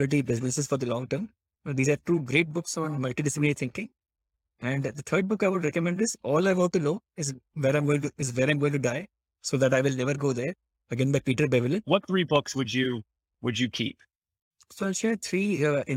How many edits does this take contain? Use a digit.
2